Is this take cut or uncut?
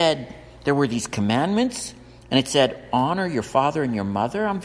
uncut